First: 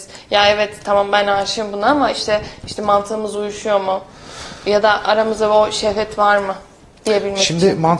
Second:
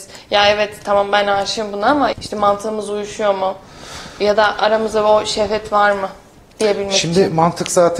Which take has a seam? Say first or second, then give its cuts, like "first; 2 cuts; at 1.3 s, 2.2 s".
second; 1 cut; at 2.1 s